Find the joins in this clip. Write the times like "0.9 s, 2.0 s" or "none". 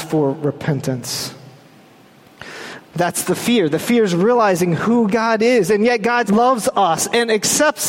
2.8 s, 6.3 s